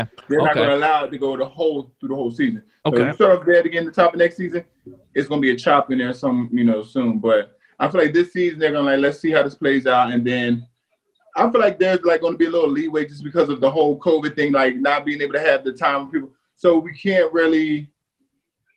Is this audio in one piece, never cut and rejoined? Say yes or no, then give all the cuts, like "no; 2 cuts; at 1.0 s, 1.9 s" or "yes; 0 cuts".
yes; 0 cuts